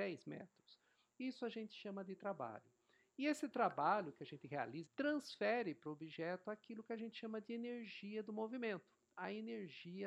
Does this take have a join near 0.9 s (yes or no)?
no